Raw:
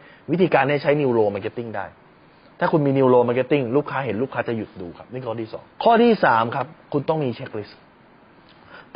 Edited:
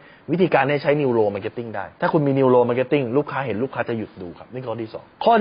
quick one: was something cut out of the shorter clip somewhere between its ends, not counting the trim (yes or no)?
yes